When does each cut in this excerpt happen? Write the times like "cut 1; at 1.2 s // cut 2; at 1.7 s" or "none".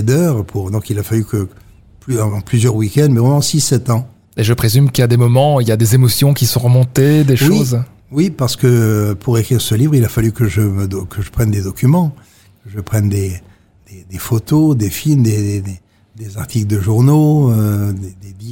cut 1; at 4.2 s